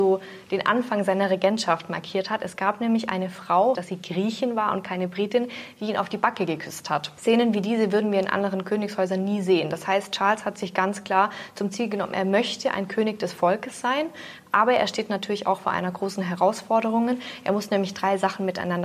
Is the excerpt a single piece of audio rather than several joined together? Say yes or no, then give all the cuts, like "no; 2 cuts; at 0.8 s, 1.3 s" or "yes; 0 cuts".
no; 1 cut; at 3.7 s